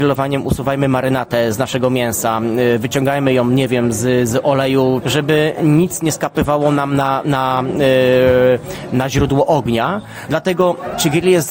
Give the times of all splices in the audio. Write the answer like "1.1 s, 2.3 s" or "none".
5.0 s, 10.3 s